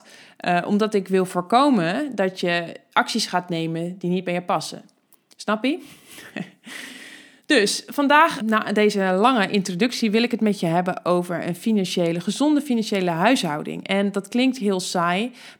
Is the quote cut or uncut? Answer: cut